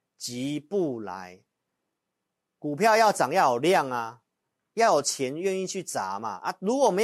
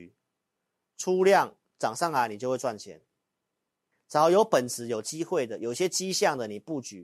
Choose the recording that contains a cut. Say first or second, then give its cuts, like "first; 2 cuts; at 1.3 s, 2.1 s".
second; 1 cut; at 3.9 s